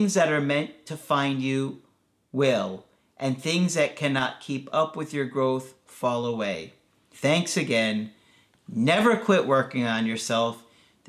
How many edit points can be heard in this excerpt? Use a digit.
1